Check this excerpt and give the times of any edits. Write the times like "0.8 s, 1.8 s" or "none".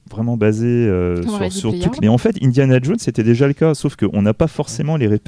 2.0 s